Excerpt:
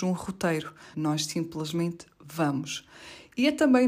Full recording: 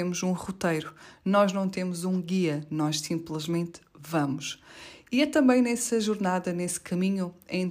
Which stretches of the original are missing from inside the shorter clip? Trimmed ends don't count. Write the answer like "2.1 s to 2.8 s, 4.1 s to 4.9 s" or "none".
1.1 s to 2.7 s